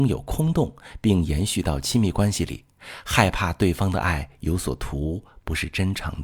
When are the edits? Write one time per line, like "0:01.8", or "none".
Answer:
none